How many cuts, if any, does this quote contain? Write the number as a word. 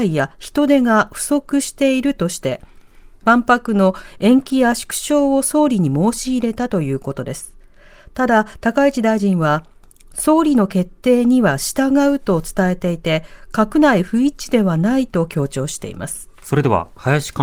one